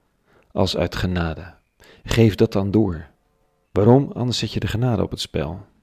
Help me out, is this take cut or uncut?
cut